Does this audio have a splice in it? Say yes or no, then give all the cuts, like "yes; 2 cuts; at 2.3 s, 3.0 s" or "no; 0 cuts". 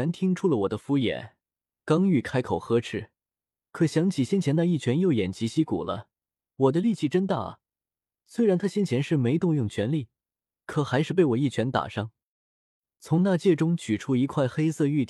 no; 0 cuts